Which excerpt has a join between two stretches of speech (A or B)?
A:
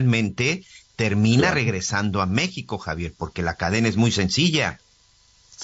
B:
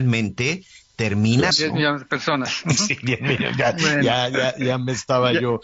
B